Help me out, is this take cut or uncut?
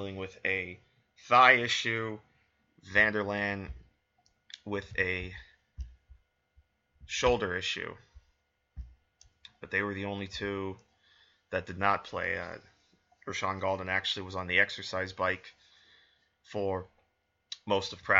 uncut